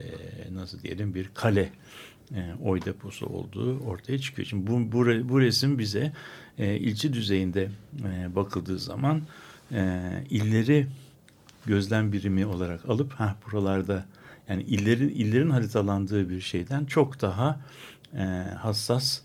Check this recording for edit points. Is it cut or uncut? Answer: uncut